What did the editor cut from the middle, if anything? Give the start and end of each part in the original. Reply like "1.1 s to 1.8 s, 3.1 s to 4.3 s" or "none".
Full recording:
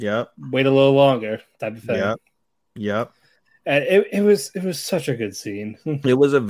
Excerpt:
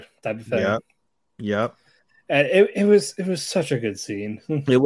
none